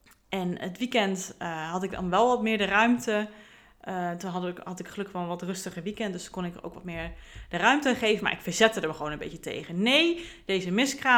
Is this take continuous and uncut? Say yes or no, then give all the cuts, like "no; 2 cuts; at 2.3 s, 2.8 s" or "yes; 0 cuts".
yes; 0 cuts